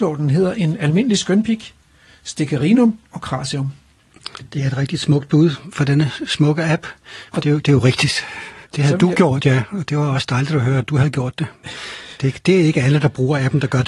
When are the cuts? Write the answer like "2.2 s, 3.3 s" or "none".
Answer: 8.7 s